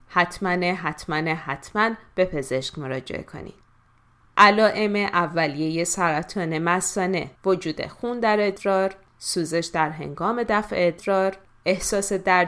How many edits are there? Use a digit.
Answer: 2